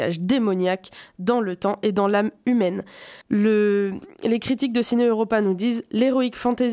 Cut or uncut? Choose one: cut